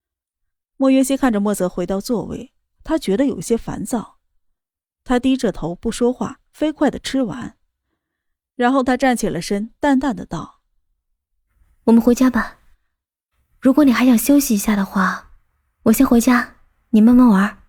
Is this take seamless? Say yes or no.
yes